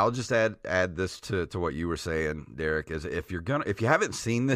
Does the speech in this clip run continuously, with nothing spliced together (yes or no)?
yes